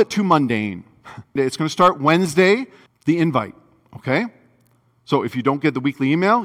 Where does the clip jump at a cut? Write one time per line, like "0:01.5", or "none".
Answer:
0:01.4
0:02.9

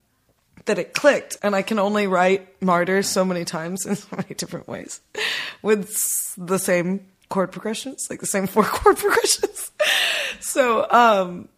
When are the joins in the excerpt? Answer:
0:01.4

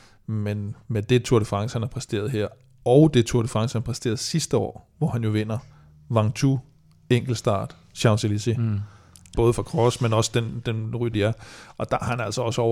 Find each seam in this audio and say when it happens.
0:09.3
0:11.1

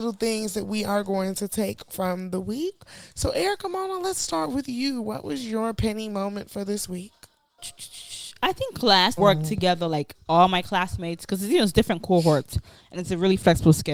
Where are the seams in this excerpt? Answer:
0:07.6
0:09.2

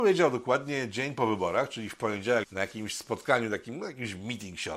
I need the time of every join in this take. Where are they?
0:02.4

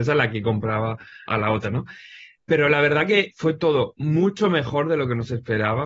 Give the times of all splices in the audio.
0:01.3

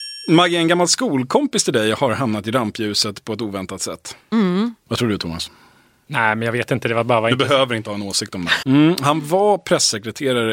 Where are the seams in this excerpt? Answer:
0:04.9
0:08.6

